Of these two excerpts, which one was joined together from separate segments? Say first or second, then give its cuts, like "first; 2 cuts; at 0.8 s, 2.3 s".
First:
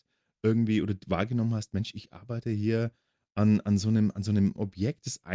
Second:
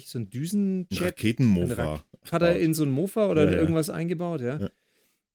second; 1 cut; at 2.3 s